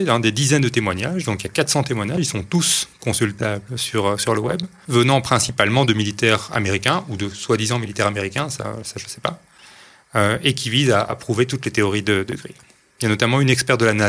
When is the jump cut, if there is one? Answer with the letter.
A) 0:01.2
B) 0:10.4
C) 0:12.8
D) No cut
D